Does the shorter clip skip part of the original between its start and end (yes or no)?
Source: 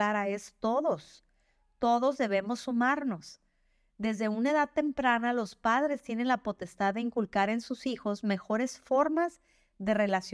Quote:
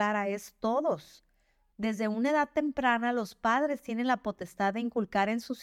yes